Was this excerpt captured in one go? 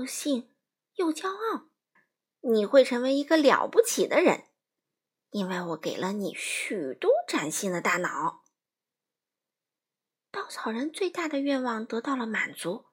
no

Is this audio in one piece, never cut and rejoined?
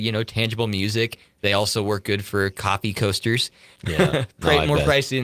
no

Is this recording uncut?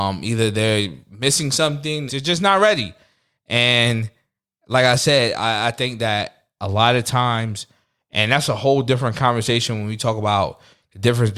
no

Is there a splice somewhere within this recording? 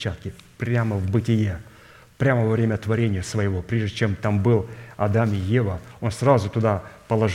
no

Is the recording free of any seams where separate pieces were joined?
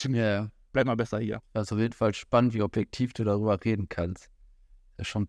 no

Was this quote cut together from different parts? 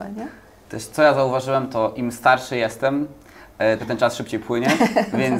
yes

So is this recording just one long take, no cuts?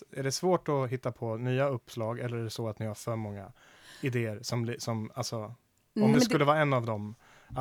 no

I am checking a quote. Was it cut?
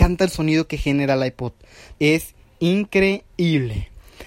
yes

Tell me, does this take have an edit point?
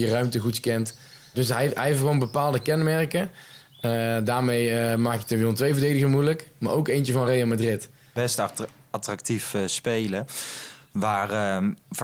yes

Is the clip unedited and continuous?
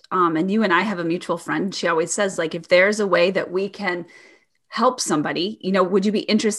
yes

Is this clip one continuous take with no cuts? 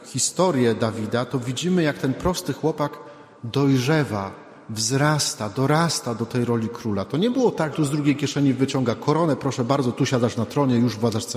no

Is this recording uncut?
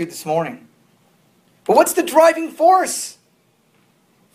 yes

